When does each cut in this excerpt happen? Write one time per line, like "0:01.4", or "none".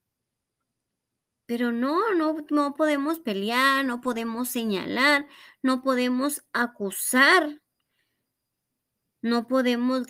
none